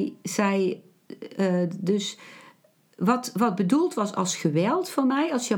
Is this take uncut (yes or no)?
yes